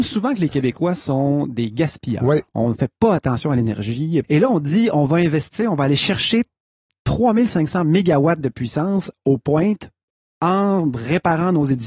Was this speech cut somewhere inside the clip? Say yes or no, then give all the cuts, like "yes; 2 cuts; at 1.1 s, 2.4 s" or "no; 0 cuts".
yes; 1 cut; at 4.2 s